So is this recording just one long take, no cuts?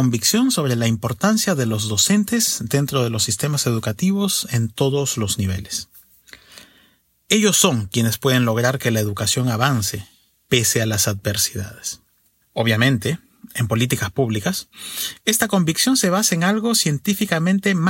yes; 0 cuts

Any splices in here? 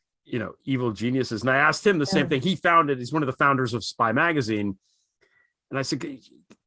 no; 0 cuts

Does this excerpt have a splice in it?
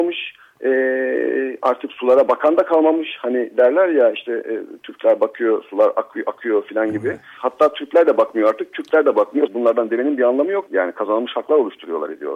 yes; 3 cuts; at 7.4 s, 9.5 s, 10.7 s

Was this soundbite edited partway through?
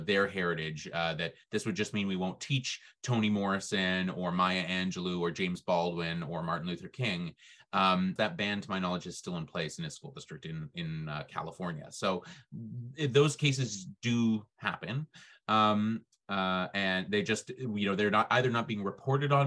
yes; 1 cut; at 8.2 s

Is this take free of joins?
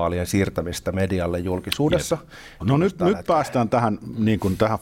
no; 1 cut; at 2.6 s

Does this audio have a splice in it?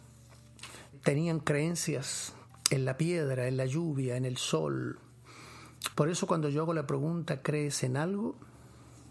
yes; 2 cuts; at 0.9 s, 5.9 s

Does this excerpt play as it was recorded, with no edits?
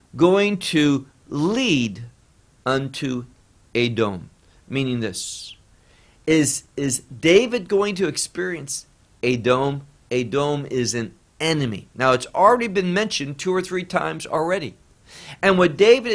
yes; 0 cuts

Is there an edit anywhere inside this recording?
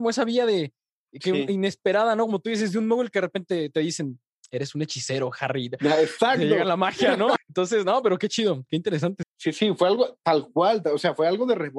yes; 2 cuts; at 7.4 s, 9.2 s

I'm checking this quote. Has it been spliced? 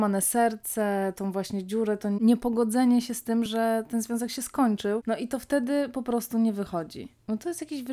no; 0 cuts

